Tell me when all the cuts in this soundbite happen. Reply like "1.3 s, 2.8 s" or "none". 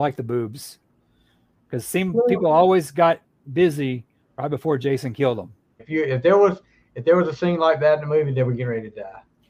5.8 s